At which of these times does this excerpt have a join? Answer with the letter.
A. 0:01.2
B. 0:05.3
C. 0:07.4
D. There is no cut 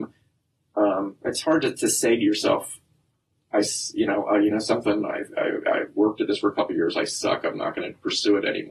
D